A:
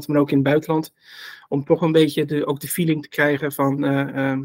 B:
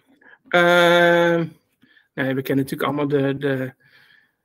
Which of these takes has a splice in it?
B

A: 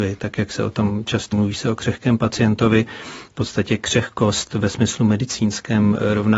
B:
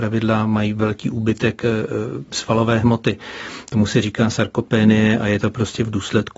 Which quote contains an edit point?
A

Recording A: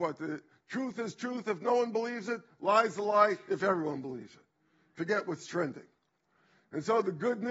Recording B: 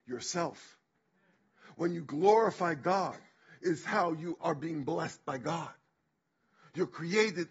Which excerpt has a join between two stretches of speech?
B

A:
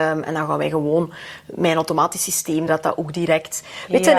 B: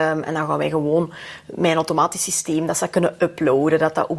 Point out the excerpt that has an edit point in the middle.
A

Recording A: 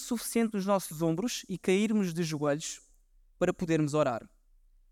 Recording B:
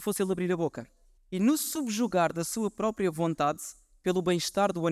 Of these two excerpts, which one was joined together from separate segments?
B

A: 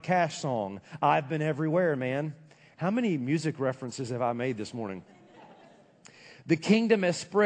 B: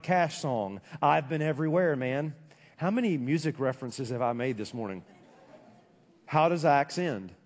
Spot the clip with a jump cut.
B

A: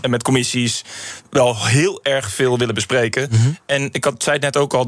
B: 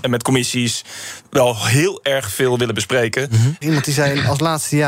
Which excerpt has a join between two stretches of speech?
B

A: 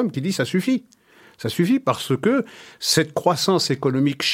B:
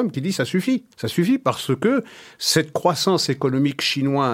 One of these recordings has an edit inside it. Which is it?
B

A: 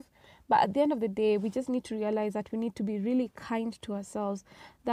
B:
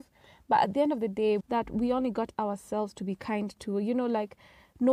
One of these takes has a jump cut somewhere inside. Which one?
B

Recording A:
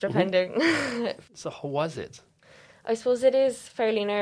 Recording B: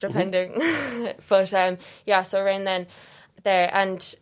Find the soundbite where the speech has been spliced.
A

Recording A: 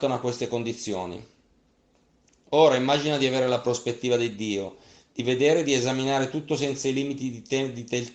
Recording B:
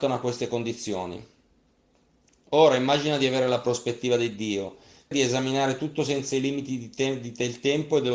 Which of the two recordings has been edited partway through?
B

